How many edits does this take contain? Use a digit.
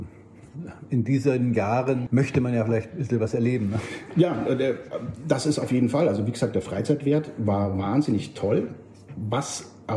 1